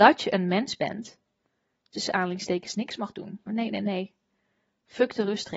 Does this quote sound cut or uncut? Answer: cut